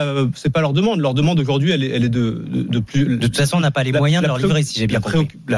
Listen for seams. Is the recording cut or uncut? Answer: uncut